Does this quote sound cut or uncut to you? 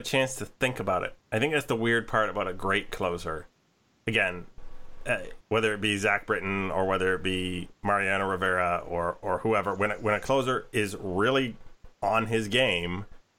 cut